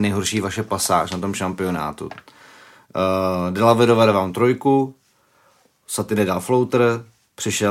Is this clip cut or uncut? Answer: uncut